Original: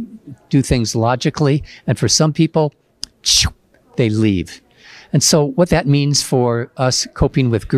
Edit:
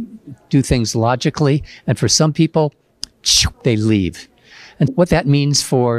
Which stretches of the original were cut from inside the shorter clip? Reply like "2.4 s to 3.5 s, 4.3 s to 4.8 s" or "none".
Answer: 3.5 s to 3.9 s, 5.2 s to 5.5 s